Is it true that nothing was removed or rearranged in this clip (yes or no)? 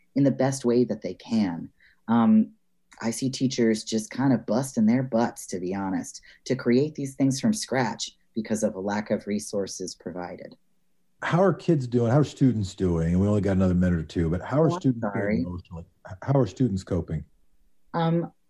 yes